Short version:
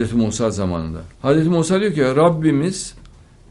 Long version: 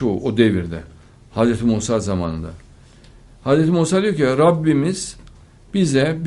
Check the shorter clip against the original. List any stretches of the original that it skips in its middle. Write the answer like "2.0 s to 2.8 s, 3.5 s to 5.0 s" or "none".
2.6 s to 3.4 s